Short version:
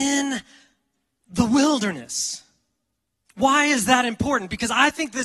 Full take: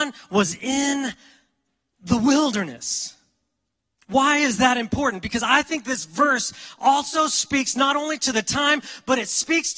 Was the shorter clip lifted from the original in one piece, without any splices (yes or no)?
yes